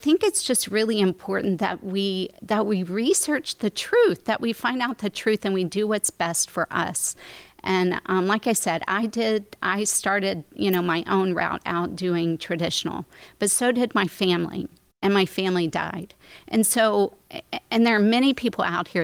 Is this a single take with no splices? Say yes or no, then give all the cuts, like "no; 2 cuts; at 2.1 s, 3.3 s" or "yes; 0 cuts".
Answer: yes; 0 cuts